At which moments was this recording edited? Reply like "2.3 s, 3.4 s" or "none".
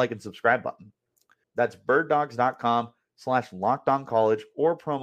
1.4 s